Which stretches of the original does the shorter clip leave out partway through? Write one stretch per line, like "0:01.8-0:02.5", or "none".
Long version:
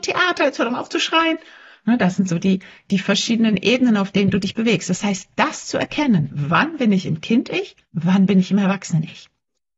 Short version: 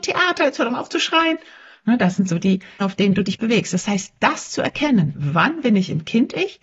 0:02.8-0:04.0